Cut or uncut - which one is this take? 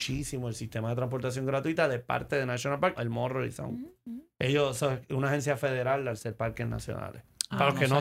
cut